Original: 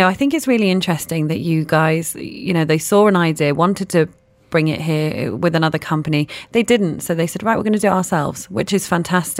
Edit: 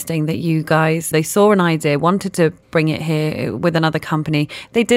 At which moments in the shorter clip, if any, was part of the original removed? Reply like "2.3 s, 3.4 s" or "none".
1.1 s, 2.6 s

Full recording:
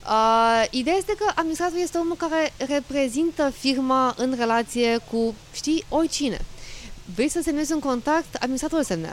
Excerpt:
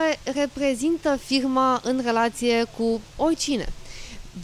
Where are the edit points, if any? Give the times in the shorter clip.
3.1 s

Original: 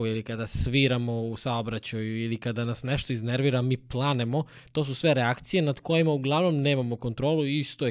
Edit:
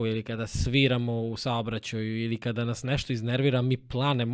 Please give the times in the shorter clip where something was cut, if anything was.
none

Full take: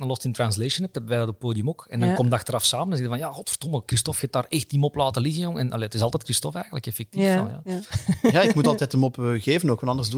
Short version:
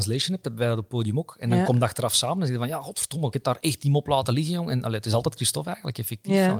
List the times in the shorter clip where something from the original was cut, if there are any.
3.3 s

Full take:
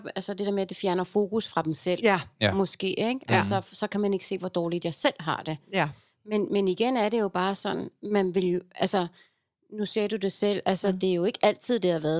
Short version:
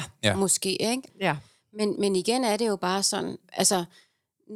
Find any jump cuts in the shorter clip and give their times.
1.1 s, 3.4 s

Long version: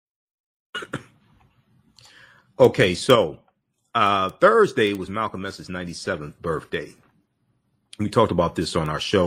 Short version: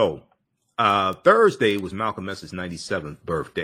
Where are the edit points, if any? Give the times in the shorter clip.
none

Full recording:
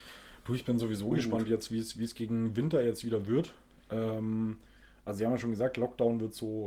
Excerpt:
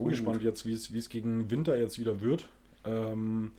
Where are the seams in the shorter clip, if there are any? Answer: none

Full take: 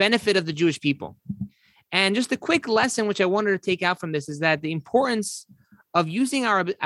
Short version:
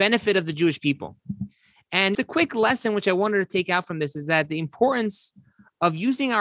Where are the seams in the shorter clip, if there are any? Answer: 2.1 s

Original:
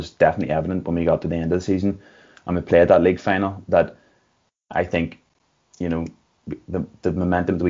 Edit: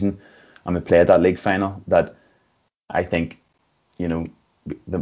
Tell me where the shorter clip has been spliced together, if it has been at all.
none

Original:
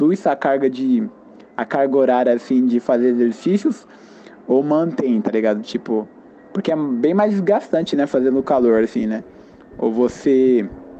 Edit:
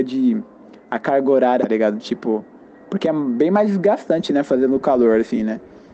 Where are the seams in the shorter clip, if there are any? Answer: 1.6 s

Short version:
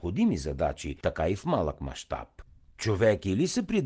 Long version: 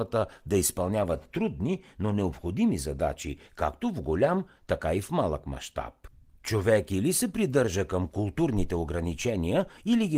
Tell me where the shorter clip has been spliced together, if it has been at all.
1.0 s

